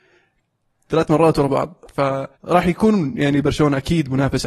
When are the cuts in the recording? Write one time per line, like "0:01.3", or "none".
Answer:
0:02.3